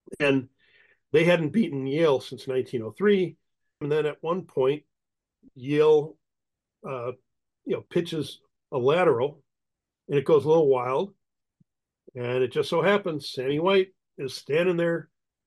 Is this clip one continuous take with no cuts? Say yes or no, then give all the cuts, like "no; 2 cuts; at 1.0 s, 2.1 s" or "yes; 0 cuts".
no; 1 cut; at 3.8 s